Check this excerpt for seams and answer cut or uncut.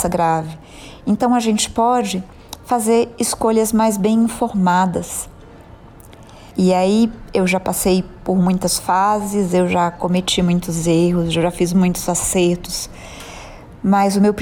cut